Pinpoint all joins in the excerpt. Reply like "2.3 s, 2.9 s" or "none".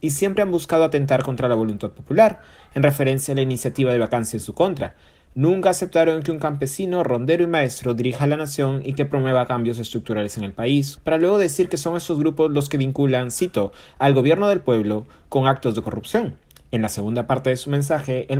11.0 s

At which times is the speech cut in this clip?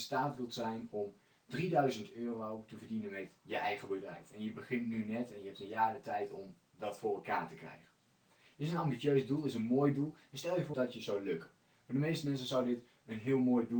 10.7 s

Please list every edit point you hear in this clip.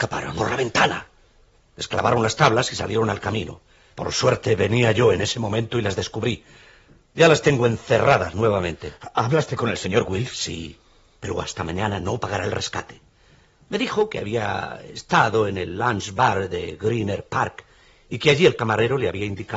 none

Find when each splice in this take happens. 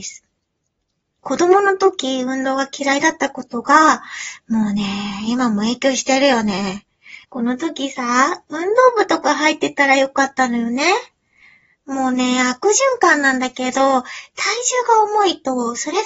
1.2 s, 7.2 s

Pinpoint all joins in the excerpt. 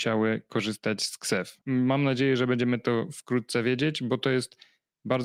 1.6 s

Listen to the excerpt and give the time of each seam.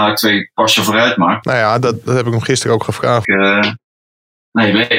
1.4 s, 3.2 s

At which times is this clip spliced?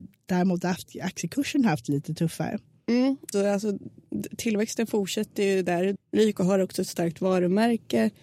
3.3 s, 6.0 s

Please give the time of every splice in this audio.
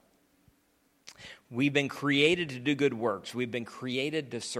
none

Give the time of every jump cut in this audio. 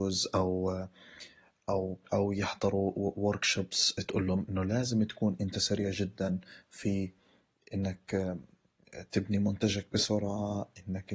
2.1 s

